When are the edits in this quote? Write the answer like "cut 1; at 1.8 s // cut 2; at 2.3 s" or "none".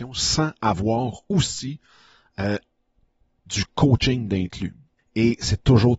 cut 1; at 5.0 s

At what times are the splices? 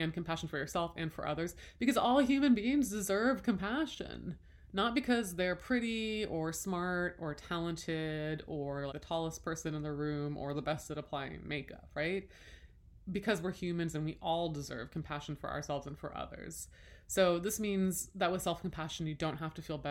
cut 1; at 8.9 s

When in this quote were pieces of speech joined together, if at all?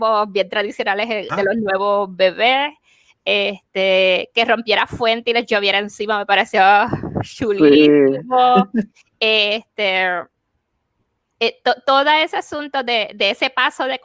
cut 1; at 1.3 s

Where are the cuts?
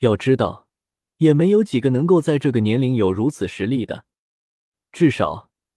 cut 1; at 1.1 s

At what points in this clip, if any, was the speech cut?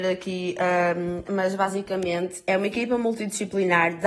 cut 1; at 1.2 s

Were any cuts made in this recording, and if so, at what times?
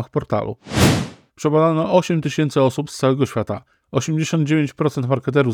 cut 1; at 1.3 s // cut 2; at 3.8 s

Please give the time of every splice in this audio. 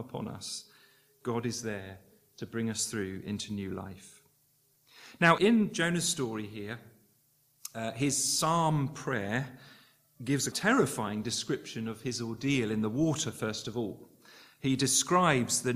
cut 1; at 5.4 s // cut 2; at 10.5 s

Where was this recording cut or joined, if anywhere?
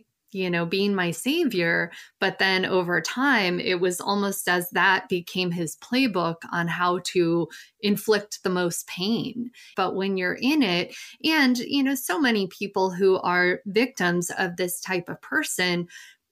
cut 1; at 9.7 s

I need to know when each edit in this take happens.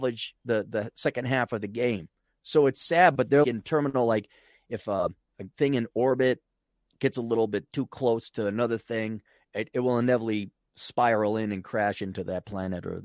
cut 1; at 3.4 s

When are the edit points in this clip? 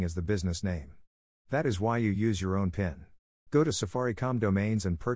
cut 1; at 3.5 s

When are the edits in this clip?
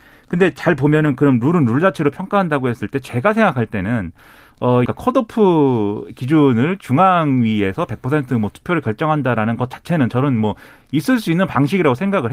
cut 1; at 4.9 s

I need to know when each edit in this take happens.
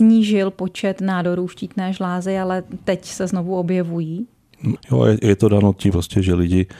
cut 1; at 4.8 s // cut 2; at 5.9 s

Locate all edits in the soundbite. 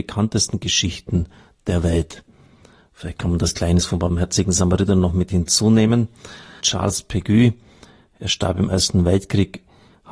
cut 1; at 6.6 s

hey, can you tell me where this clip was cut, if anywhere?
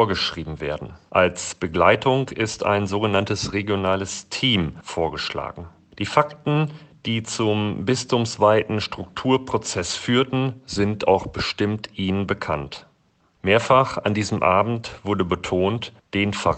cut 1; at 1.1 s // cut 2; at 13.2 s

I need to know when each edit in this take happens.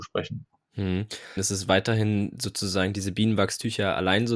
cut 1; at 1.4 s

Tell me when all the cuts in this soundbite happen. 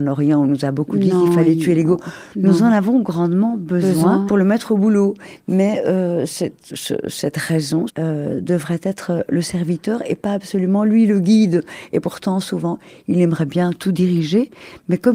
cut 1; at 4.3 s // cut 2; at 6.7 s // cut 3; at 7.9 s

